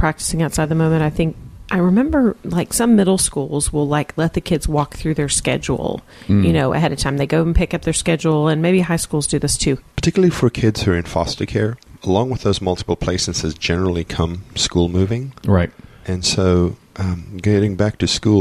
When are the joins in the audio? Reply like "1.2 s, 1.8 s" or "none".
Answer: 9.8 s, 12.0 s